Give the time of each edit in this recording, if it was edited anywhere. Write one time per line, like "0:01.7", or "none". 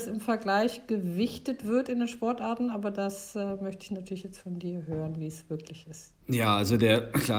0:06.2